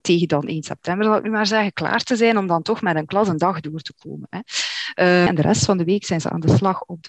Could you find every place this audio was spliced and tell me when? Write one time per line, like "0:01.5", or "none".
0:05.3